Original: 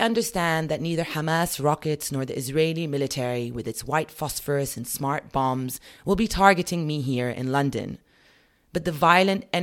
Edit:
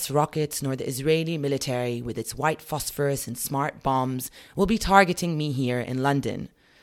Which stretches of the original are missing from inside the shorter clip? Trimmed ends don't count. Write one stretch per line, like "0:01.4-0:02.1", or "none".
none